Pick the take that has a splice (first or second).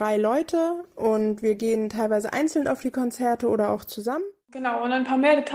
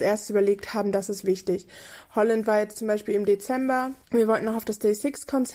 second